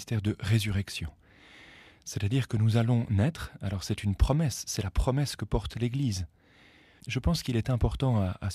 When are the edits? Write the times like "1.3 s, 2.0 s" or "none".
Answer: 7.0 s